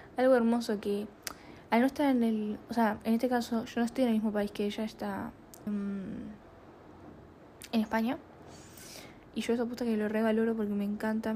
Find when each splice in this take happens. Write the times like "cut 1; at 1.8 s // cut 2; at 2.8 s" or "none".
cut 1; at 5.7 s // cut 2; at 9.3 s